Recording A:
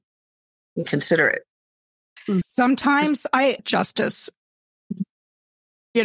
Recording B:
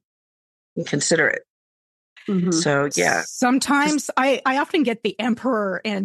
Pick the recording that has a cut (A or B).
A